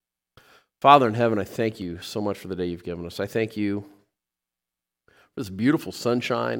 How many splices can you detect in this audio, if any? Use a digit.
0